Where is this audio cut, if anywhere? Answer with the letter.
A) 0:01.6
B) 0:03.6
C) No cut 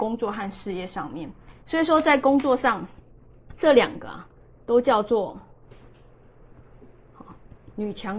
A